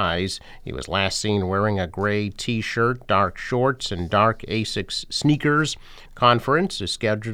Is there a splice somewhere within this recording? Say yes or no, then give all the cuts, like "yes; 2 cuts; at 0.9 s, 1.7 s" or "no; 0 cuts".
yes; 1 cut; at 6.1 s